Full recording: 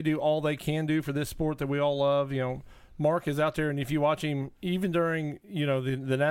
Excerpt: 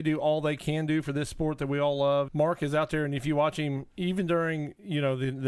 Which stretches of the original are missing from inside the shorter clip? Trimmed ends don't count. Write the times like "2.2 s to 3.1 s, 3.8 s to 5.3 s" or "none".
2.3 s to 2.9 s